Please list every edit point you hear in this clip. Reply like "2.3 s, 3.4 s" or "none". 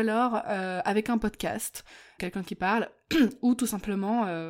2.2 s